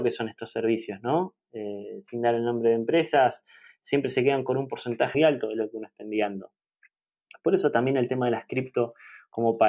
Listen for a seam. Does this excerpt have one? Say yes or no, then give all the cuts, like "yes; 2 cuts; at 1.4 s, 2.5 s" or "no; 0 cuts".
yes; 1 cut; at 5.1 s